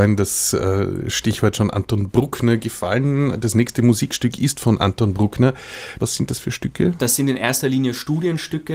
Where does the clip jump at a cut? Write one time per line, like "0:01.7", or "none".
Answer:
0:06.0